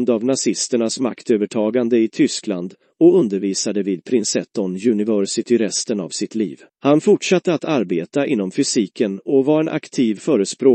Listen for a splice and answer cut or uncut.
cut